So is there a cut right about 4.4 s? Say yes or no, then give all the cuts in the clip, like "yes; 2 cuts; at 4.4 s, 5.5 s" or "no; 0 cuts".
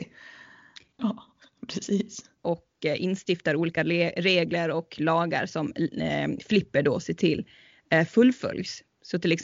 no; 2 cuts; at 1.0 s, 2.4 s